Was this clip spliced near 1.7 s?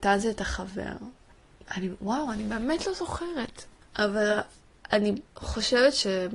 no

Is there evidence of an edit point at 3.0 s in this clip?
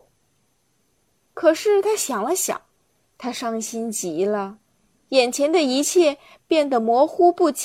yes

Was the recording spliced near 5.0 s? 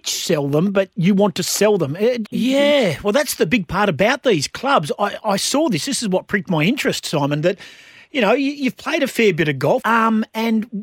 no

